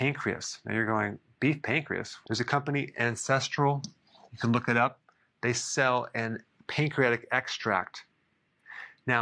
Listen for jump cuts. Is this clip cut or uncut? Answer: cut